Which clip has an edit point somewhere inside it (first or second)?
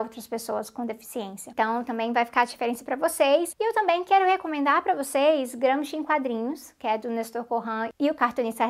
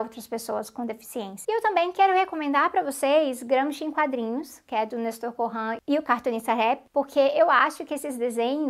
second